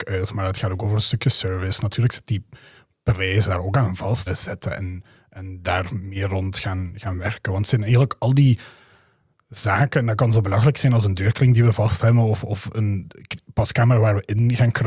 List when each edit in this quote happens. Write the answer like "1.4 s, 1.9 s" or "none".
4.3 s

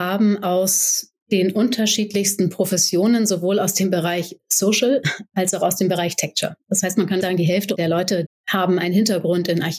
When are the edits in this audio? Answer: 7.2 s, 8.3 s

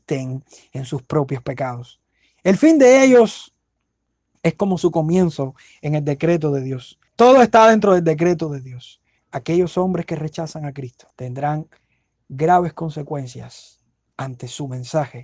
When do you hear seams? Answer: 7.1 s, 9.2 s, 11.1 s

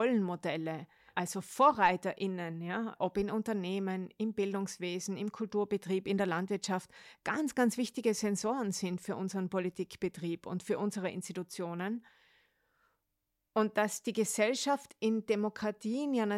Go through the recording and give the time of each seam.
none

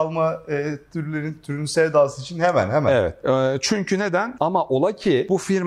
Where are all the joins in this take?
4.4 s

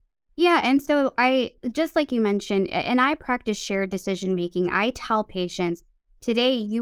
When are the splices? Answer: none

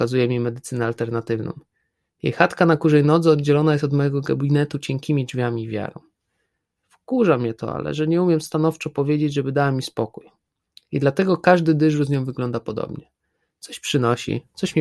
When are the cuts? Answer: 6.8 s

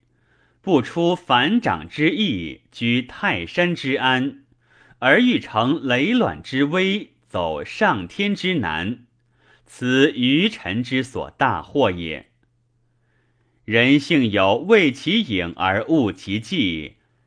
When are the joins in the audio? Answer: none

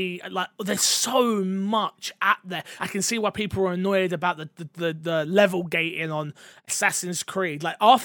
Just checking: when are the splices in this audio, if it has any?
none

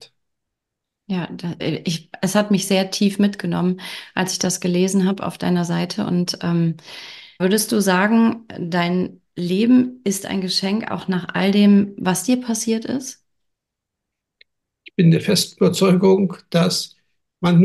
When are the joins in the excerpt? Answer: 1.6 s, 7.4 s

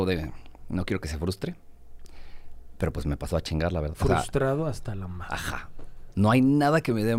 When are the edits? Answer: 3.9 s

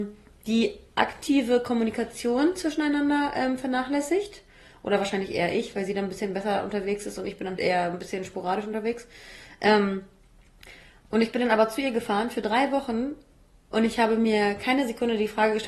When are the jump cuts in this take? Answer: 7.6 s

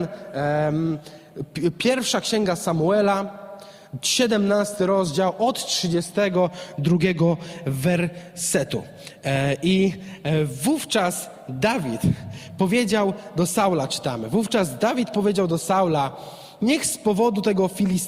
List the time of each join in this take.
none

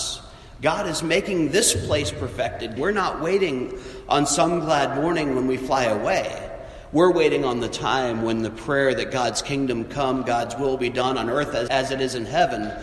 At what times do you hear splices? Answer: 2.8 s, 11.7 s

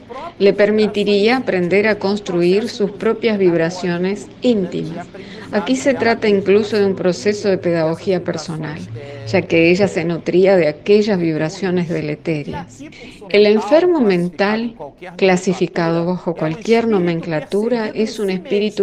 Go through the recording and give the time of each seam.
13.3 s

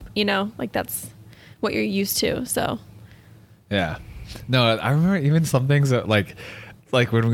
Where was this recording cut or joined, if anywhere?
none

